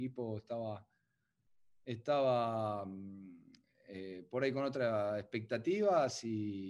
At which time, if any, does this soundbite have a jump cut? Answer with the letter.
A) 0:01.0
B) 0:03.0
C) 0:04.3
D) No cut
D